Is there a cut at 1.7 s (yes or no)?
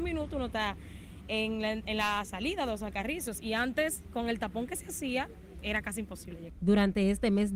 no